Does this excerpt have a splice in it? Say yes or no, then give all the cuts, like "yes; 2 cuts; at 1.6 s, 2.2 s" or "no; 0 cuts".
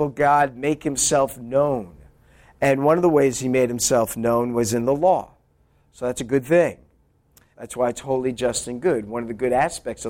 yes; 1 cut; at 7.5 s